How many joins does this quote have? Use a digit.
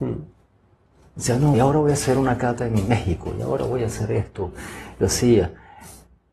1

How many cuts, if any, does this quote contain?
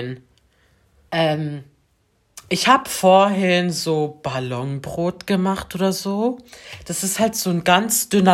1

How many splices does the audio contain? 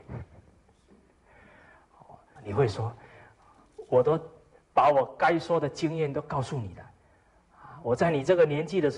1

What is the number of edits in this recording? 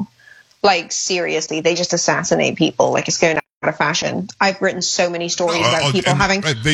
0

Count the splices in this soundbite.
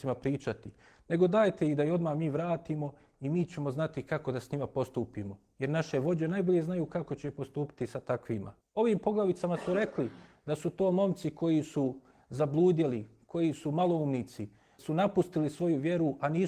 2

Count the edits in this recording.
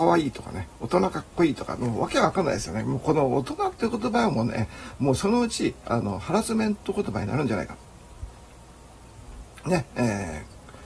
0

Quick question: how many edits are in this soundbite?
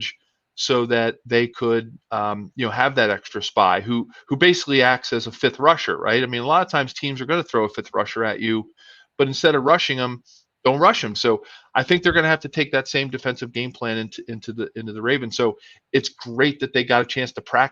1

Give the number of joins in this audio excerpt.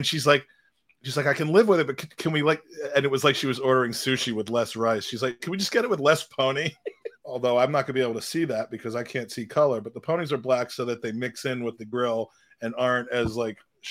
3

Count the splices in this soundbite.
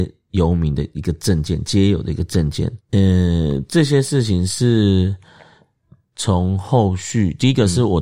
1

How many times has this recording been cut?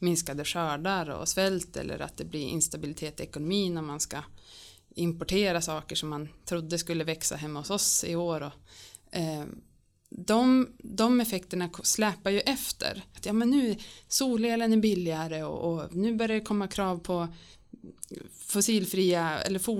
1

